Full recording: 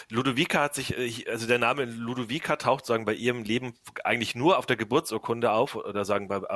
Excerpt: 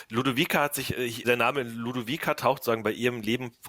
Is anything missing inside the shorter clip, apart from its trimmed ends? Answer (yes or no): yes